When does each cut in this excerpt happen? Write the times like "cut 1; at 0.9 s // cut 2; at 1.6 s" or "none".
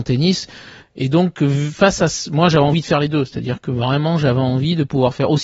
none